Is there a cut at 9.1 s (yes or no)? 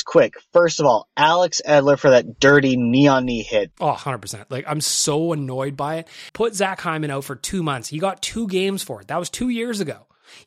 no